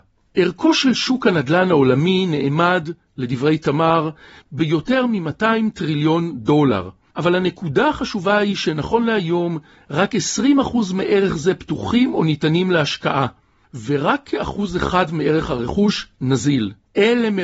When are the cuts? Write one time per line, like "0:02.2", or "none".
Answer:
none